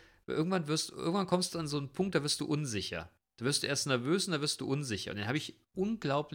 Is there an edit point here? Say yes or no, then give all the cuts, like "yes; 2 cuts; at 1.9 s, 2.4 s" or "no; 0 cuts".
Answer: no; 0 cuts